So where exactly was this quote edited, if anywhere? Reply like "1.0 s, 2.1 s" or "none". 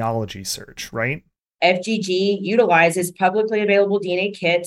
1.5 s